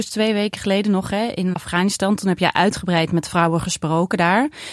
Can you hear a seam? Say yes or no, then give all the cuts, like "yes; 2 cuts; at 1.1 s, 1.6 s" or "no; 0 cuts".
yes; 1 cut; at 1.5 s